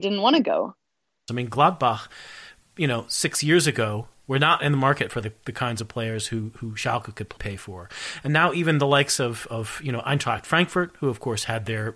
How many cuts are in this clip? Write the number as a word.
one